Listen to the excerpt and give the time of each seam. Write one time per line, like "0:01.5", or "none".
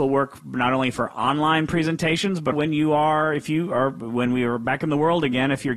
0:02.5